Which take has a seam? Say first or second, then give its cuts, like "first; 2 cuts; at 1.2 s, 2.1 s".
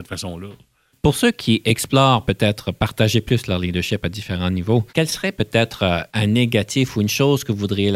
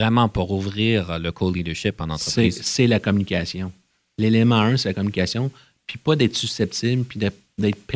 first; 2 cuts; at 4.9 s, 6.1 s